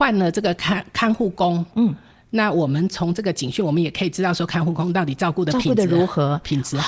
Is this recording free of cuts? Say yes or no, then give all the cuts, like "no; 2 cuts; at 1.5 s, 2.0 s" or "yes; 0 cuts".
yes; 0 cuts